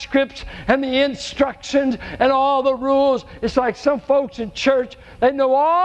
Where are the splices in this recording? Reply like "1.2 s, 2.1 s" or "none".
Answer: none